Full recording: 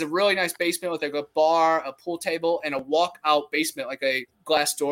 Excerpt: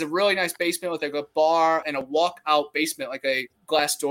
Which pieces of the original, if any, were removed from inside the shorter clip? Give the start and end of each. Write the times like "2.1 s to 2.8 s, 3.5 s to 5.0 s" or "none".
1.8 s to 2.6 s

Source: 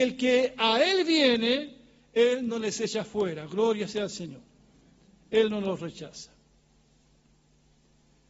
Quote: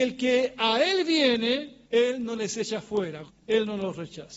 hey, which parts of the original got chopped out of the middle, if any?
1.8 s to 2.1 s, 3.5 s to 5.1 s

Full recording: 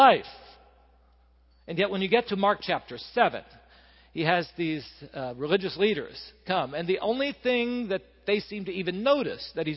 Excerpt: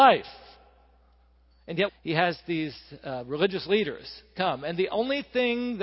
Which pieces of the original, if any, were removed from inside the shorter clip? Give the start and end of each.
1.9 s to 4.0 s

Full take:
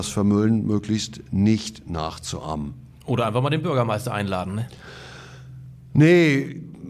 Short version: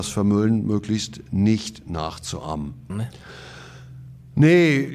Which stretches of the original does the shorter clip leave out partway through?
2.9 s to 4.5 s

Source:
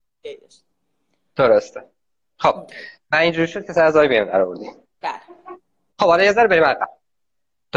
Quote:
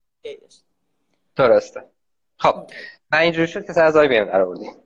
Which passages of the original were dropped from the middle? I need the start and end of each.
none

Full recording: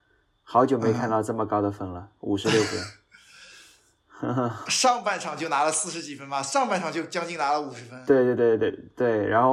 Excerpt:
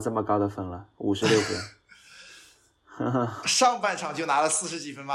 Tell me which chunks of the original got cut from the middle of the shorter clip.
none

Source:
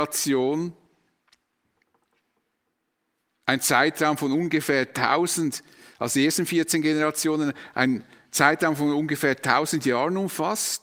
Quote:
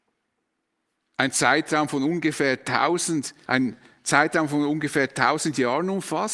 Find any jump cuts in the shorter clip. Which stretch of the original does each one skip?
5.7 s to 7.7 s

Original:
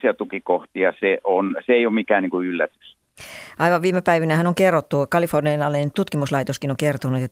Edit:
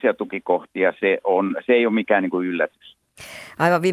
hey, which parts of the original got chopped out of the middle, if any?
none

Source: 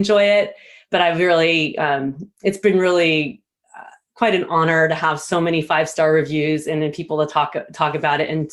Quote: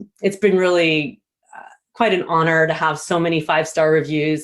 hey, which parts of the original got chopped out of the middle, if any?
none

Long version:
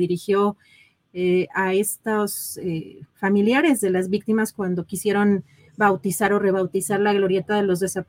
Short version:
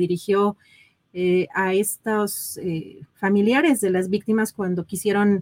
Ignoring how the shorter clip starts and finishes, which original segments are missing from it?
none

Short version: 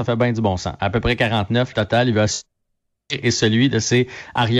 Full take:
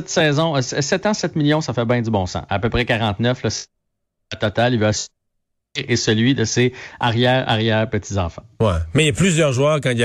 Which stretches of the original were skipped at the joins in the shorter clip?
3.4 s to 4.4 s

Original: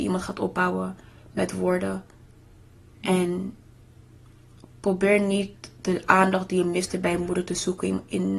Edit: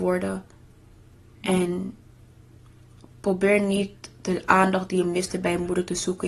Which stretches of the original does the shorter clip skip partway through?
none

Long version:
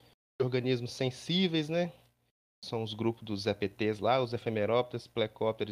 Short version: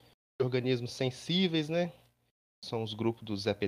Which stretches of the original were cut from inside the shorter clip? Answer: none

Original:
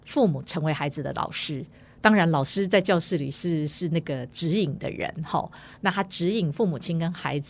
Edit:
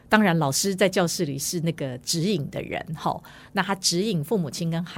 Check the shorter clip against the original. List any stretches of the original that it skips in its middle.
3.3 s to 3.7 s

